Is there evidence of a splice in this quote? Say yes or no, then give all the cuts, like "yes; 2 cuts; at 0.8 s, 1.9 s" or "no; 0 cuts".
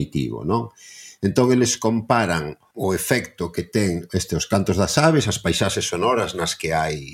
no; 0 cuts